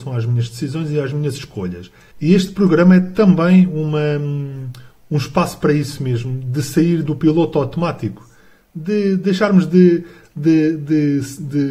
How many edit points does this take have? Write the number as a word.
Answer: one